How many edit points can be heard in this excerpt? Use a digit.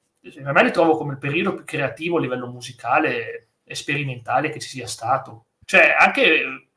1